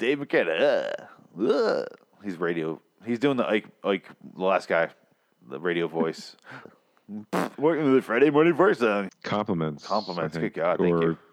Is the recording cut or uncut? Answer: cut